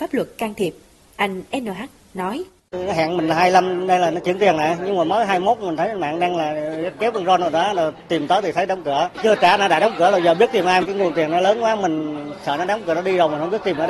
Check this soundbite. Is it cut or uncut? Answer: uncut